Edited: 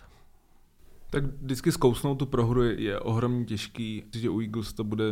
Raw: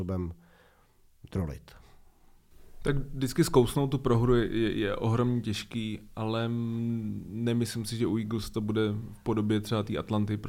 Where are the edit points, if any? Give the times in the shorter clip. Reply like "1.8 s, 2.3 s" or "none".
2.8 s, 4.1 s